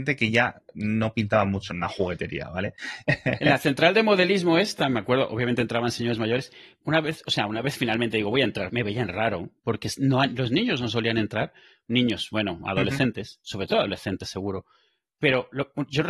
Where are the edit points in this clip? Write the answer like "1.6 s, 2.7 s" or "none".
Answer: 8.7 s